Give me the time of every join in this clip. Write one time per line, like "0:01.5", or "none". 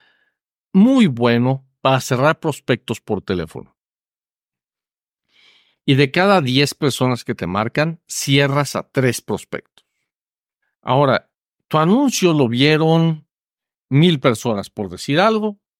none